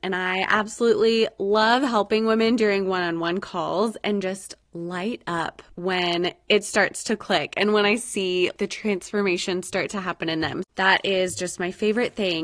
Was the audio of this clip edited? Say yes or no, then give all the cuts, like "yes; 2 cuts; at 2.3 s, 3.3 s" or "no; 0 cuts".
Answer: no; 0 cuts